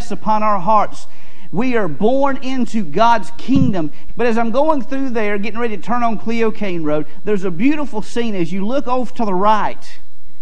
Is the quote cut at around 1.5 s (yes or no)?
no